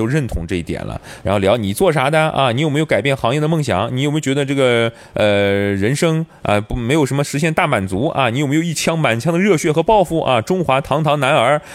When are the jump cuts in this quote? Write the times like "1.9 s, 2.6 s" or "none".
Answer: 1.2 s